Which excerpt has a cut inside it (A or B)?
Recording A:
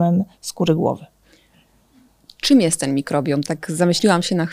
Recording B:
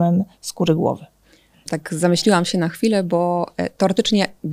B